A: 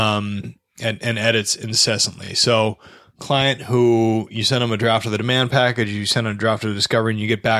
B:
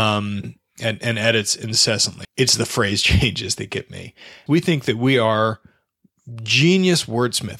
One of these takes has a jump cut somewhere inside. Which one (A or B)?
B